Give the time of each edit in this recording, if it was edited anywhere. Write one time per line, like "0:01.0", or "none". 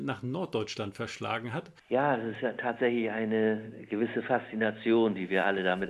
0:01.8